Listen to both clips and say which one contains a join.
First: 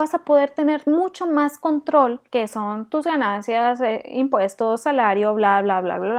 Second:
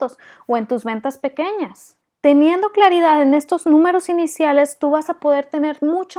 first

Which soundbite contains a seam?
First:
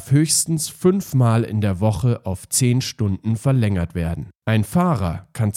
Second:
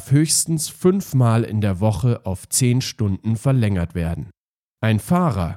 first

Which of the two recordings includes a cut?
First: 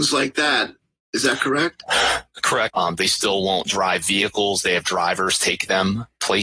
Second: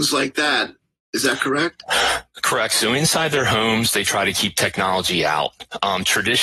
first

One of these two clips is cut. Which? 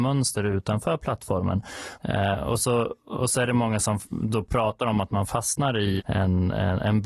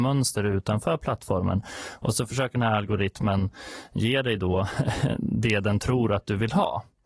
first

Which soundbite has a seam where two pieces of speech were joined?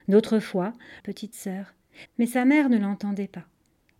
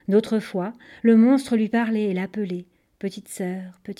first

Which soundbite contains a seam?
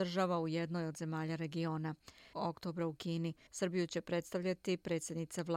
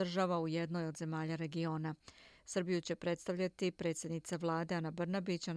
first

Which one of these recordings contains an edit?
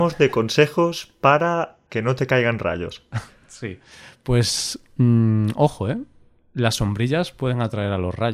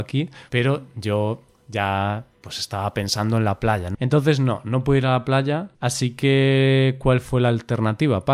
second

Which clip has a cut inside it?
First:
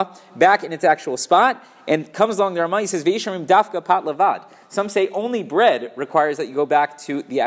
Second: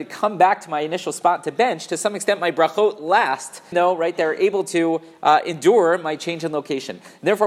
second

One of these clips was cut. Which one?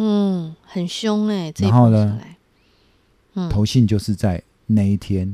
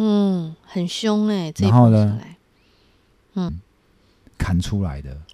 second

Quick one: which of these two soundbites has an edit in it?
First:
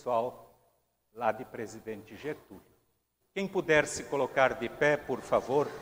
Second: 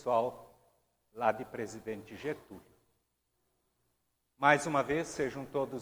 first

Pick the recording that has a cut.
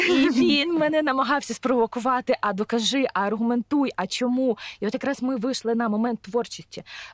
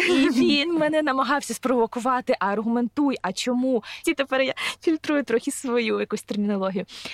second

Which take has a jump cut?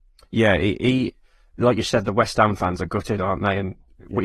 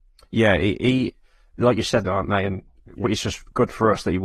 second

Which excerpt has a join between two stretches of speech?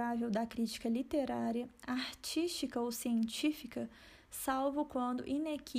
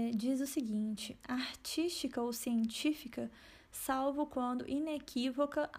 second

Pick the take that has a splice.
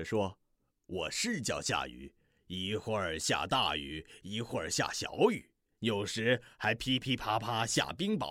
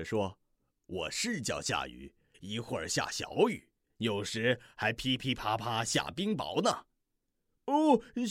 second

